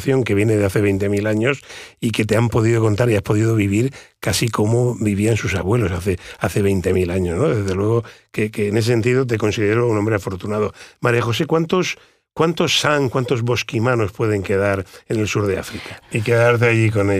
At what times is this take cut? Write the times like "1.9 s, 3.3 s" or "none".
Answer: 16.0 s

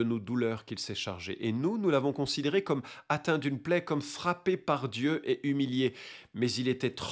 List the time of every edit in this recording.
none

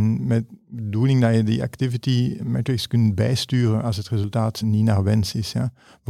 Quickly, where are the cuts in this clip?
2.4 s, 4.6 s

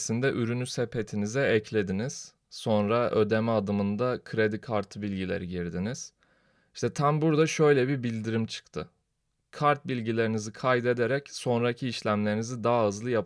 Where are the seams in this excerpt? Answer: 2.4 s

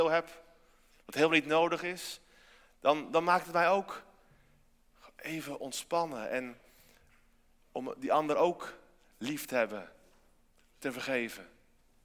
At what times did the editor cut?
none

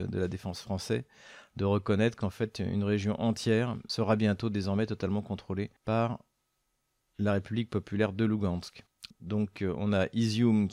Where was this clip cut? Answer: 5.8 s, 9.1 s

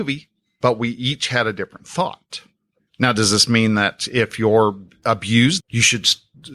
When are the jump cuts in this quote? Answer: 2.8 s, 5.6 s

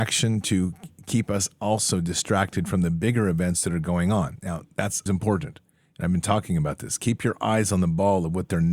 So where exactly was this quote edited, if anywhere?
5.1 s

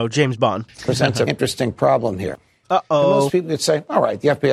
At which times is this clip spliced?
1.3 s, 2.6 s

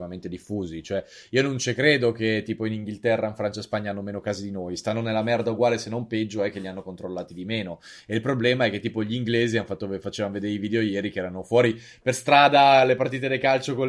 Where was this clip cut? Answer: none

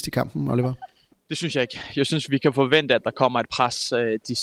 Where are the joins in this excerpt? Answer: none

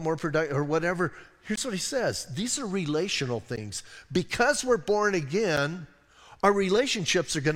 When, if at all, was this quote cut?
none

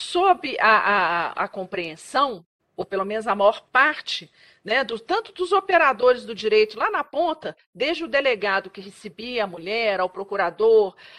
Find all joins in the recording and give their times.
none

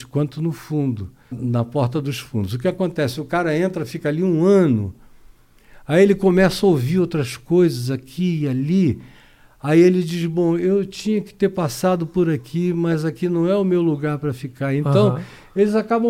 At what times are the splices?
1.3 s

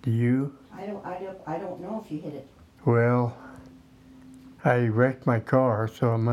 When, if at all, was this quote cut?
2.8 s, 4.6 s

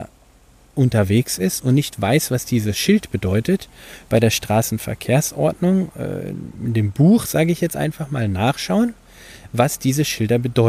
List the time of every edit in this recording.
none

